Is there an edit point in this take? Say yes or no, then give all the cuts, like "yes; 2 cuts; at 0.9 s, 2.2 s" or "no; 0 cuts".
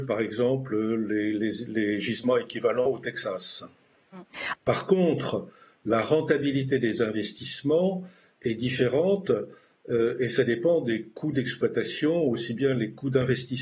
yes; 1 cut; at 4.5 s